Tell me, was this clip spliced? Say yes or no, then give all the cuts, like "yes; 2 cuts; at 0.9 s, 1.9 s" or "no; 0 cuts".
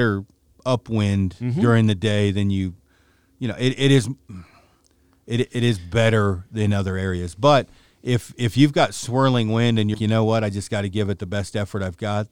yes; 1 cut; at 9.9 s